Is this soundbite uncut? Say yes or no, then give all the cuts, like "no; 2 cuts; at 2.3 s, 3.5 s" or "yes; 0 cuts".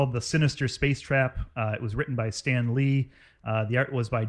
yes; 0 cuts